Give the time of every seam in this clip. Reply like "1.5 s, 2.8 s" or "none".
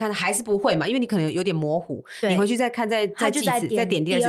none